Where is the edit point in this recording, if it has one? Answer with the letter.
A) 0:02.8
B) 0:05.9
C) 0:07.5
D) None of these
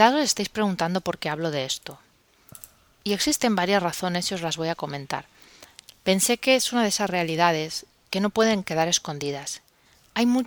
B